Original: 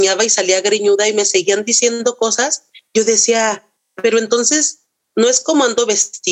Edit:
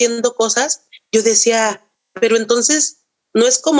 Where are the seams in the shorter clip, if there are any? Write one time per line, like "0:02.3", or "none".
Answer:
none

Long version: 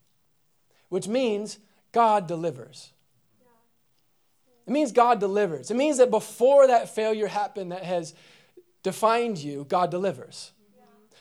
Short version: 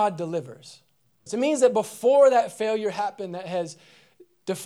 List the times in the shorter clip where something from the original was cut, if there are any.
0:01.3

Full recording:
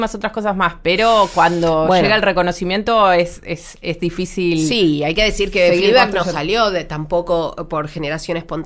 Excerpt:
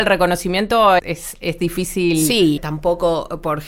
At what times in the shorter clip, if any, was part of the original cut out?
0:01.0
0:02.6

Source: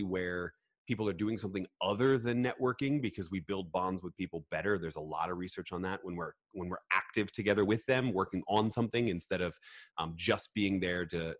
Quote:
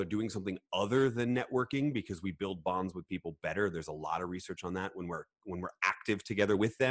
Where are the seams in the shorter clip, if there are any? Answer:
none

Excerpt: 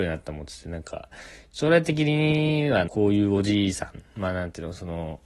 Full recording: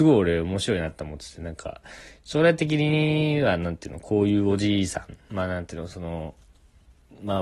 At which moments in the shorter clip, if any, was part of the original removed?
0:02.9

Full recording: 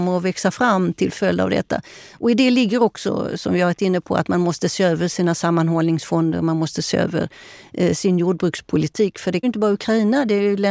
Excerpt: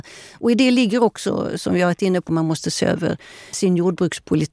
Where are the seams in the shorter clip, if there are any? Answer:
0:02.3
0:03.5

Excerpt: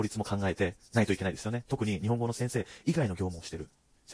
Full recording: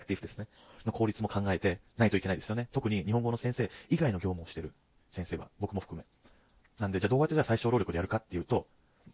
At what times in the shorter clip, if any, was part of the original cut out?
none

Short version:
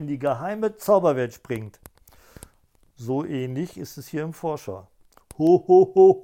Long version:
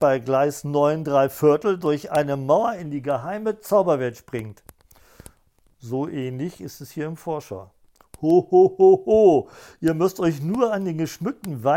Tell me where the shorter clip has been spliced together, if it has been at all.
none

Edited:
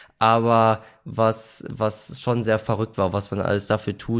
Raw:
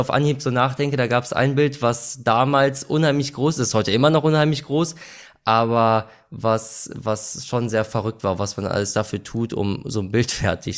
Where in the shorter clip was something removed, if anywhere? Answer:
none

